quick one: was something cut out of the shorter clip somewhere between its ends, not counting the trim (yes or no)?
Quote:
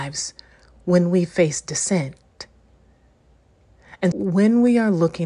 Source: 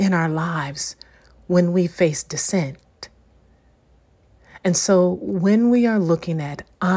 yes